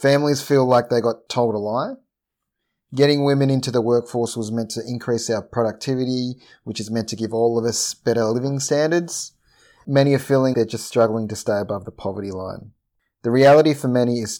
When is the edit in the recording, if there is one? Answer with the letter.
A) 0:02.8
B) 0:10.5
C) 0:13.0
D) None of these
B